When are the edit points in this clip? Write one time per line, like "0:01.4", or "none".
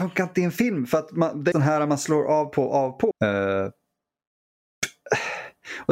0:01.5
0:03.1